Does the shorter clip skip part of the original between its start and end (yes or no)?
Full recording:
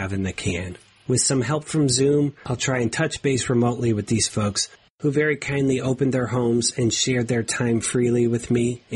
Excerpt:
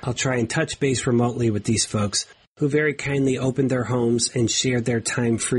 no